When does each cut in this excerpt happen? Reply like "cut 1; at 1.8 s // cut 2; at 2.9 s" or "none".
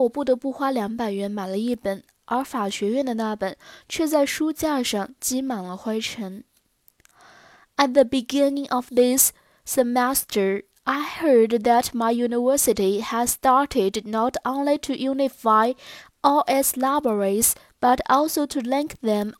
none